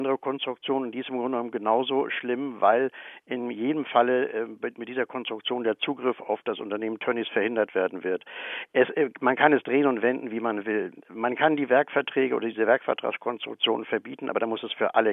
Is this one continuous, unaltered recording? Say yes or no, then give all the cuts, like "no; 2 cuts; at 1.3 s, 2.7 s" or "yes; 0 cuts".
yes; 0 cuts